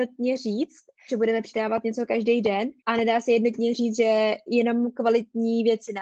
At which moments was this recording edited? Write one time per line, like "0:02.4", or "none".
0:01.1
0:02.8

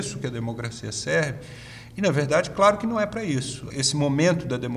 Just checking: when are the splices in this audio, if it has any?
0:03.7

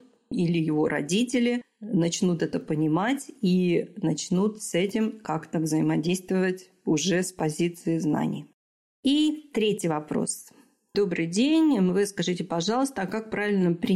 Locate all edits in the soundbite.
none

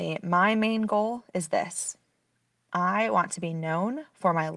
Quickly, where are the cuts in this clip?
none

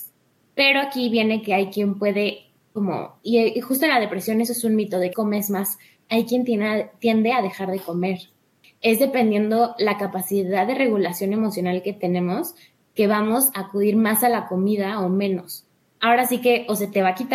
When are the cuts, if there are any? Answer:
0:05.1

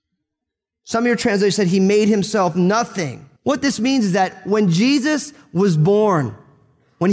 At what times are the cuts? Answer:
0:03.4

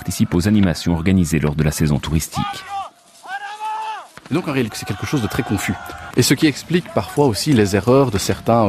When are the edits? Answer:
0:04.7
0:06.1

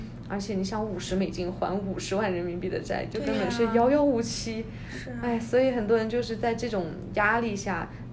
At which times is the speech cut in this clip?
none

